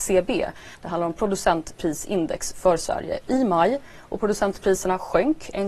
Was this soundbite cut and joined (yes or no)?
no